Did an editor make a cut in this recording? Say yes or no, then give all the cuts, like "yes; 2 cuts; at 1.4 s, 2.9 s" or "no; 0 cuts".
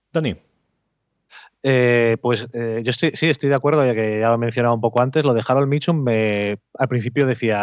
no; 0 cuts